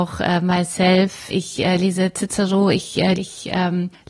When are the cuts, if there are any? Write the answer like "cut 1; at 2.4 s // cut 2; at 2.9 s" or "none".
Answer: cut 1; at 1.3 s // cut 2; at 3.1 s